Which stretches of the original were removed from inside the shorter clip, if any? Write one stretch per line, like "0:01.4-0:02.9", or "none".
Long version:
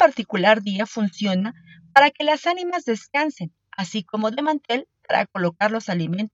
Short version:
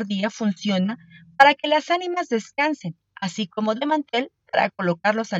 none